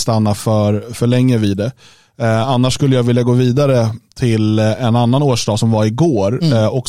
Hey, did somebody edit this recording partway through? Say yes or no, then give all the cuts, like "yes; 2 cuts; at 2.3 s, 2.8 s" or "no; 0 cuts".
no; 0 cuts